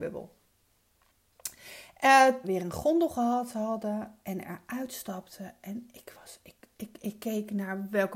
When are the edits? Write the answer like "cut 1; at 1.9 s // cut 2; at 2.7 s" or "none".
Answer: cut 1; at 2.4 s